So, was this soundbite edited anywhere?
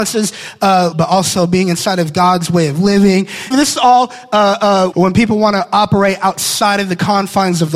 yes; 3 cuts; at 0.9 s, 3.5 s, 4.9 s

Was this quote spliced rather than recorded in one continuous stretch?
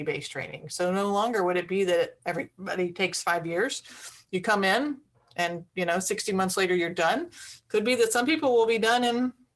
no; 0 cuts

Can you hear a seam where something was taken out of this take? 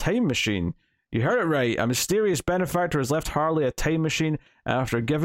no; 0 cuts

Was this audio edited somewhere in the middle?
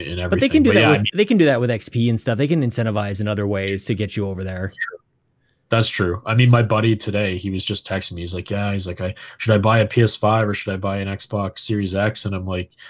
no; 0 cuts

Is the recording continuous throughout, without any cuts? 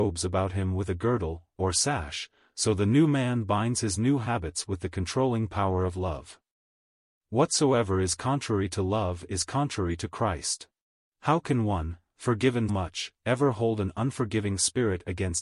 no; 2 cuts; at 11.1 s, 12.7 s

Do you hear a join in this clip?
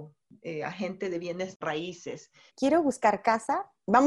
yes; 1 cut; at 2.5 s

